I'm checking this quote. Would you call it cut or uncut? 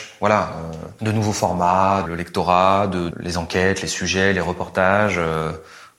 cut